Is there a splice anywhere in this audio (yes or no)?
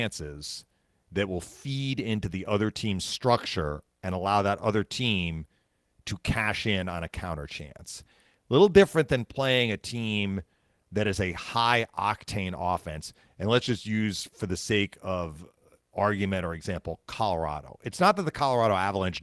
no